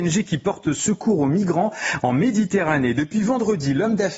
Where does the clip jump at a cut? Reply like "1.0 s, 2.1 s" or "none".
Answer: none